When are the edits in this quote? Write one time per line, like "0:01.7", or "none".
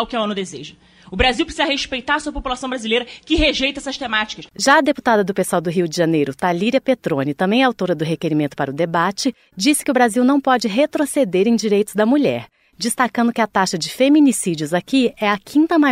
none

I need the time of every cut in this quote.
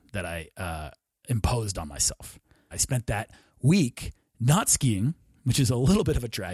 0:02.7

